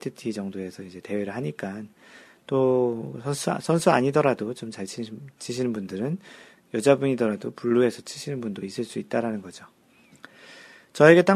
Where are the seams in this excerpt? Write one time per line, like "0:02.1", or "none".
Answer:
none